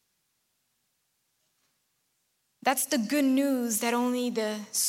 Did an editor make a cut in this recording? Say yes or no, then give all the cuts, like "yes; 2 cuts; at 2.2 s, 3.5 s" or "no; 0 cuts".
no; 0 cuts